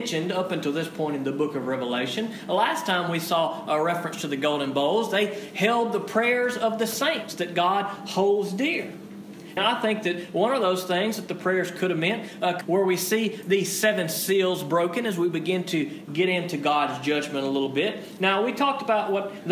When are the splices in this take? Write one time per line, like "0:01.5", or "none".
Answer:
0:09.6
0:12.6
0:18.2